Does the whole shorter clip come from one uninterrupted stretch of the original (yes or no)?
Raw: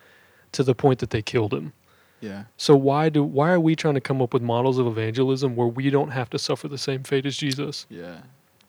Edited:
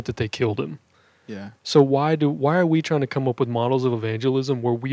yes